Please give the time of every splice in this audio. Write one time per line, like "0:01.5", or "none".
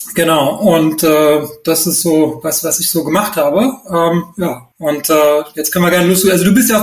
0:04.7

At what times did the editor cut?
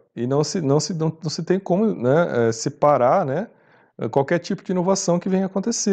none

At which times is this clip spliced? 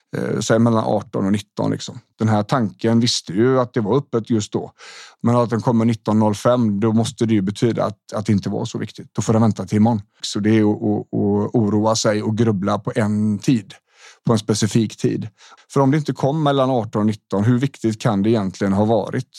0:02.1
0:10.2
0:15.6

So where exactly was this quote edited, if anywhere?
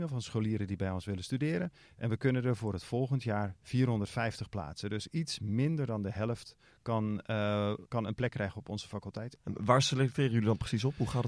0:07.9
0:09.3

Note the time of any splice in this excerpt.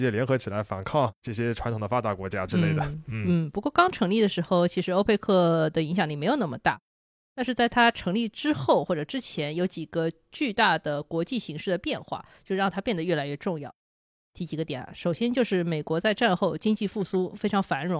none

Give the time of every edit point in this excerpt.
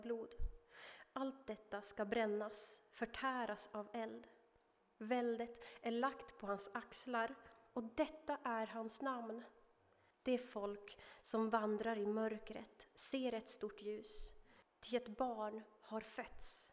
0:04.8
0:10.1
0:14.6

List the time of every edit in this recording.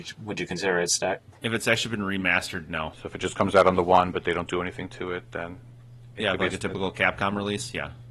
none

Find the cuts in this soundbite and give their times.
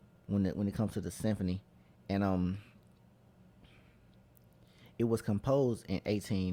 none

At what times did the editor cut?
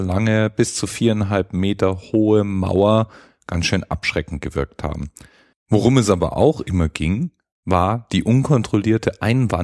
0:05.5

